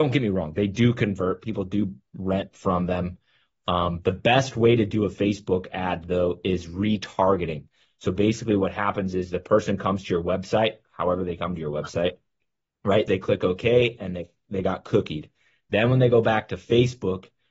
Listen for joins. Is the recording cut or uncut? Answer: cut